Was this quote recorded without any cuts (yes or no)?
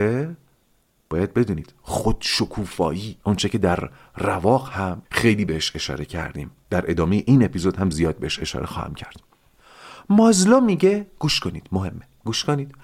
no